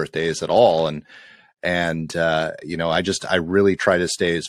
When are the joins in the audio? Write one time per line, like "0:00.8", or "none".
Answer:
none